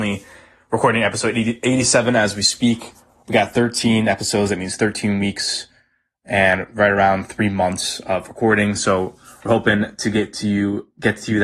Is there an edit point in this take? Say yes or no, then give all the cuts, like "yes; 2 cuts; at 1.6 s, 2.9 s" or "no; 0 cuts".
no; 0 cuts